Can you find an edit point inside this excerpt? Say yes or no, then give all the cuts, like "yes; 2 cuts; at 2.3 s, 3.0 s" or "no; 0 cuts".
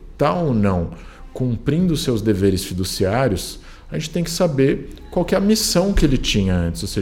no; 0 cuts